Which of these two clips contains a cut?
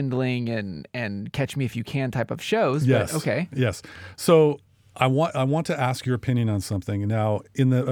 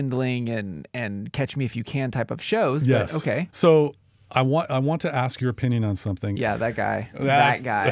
second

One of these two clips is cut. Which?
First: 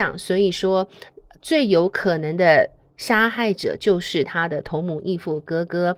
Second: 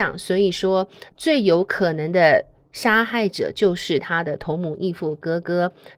second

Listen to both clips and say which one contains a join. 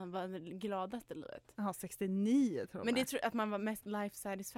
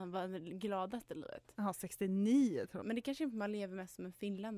second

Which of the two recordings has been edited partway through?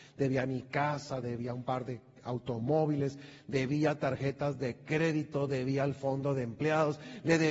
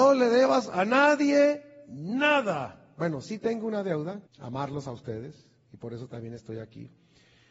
second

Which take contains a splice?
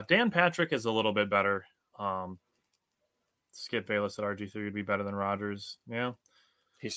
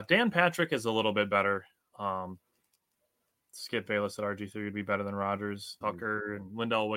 second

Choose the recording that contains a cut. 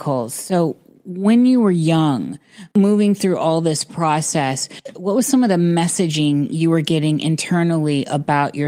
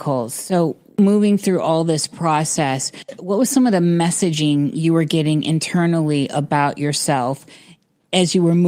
second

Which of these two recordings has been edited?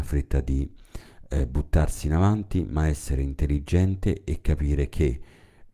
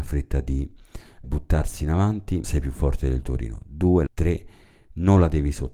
second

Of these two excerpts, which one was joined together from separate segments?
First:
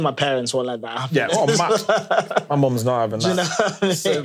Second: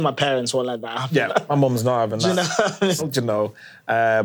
second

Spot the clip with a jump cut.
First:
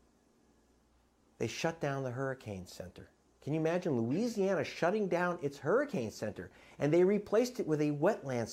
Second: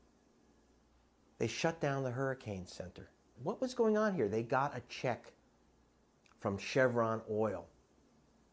second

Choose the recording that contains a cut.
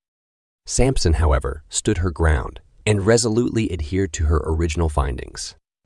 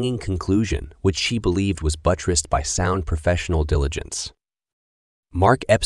first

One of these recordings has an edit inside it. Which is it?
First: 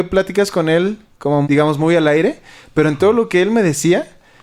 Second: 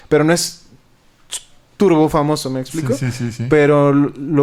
first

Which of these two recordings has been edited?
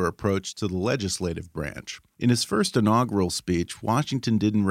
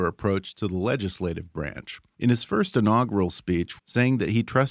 second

